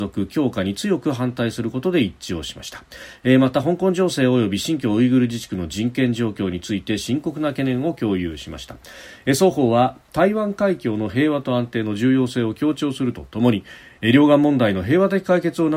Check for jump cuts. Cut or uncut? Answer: uncut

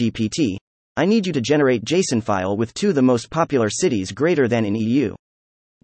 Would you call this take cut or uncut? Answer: uncut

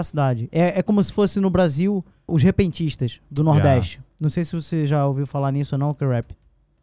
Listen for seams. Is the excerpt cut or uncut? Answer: cut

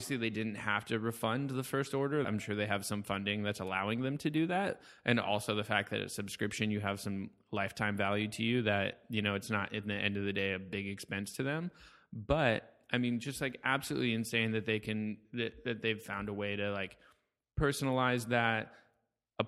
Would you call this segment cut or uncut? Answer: cut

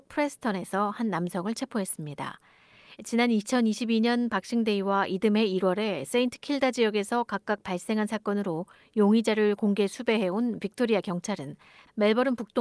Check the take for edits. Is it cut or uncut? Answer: cut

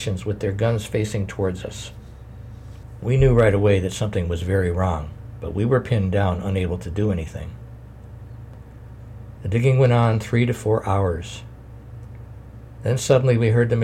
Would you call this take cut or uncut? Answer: cut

